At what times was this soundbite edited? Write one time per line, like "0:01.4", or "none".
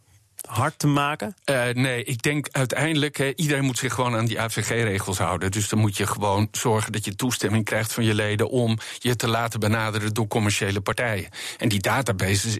0:01.4